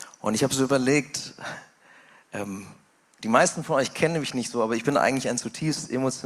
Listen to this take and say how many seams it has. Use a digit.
0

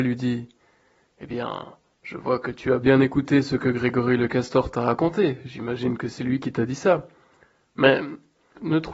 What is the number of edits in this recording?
0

